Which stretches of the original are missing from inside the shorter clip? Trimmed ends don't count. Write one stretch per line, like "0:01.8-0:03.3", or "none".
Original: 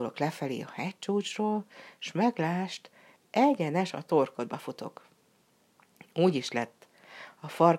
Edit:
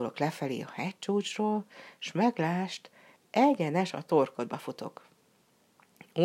none